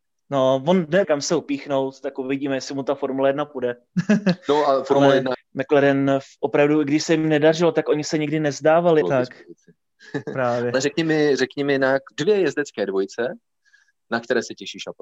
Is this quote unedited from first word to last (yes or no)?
no